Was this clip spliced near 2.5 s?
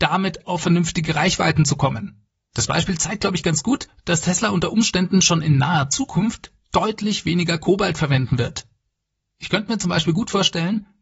yes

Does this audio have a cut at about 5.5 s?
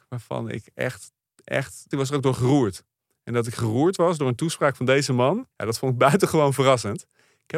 yes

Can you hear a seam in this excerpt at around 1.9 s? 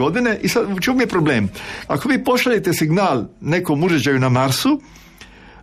yes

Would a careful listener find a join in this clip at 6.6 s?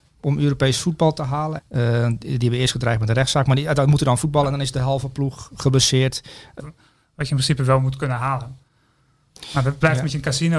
yes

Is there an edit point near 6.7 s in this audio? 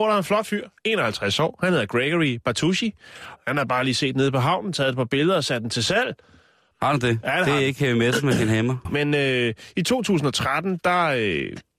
yes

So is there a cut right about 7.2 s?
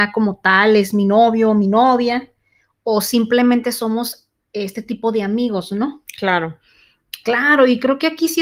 yes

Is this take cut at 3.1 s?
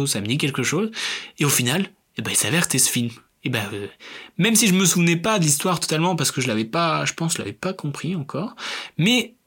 no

